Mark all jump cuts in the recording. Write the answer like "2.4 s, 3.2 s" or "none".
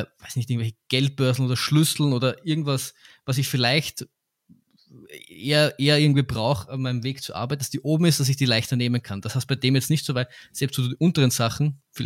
none